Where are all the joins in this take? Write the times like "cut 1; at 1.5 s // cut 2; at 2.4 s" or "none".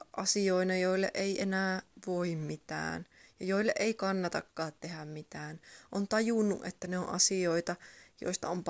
none